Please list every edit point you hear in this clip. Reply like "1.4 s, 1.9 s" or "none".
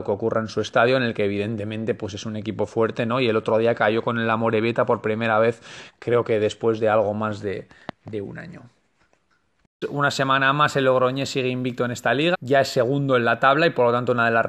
9.8 s, 12.3 s

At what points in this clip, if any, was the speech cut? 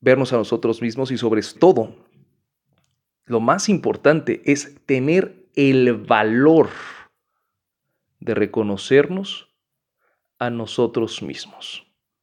1.6 s

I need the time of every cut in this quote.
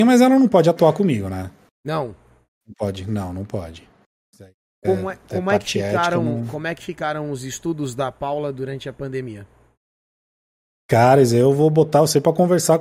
none

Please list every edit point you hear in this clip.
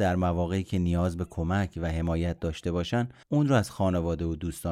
3.2 s

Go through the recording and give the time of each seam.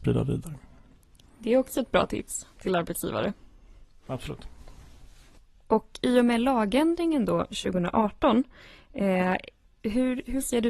none

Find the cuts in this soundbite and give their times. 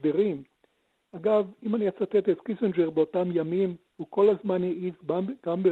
3.9 s

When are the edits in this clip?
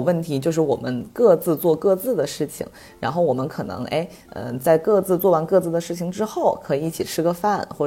none

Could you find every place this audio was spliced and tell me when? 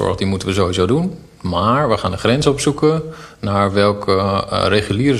none

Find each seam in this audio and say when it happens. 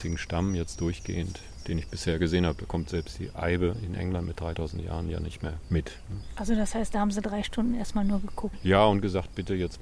none

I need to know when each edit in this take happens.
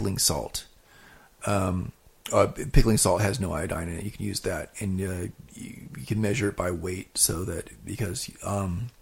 none

